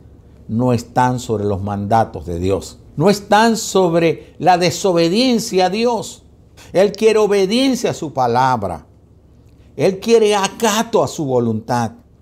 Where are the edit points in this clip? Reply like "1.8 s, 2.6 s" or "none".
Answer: 2.9 s, 6.6 s